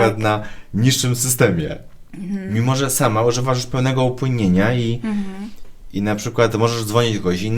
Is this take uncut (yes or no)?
yes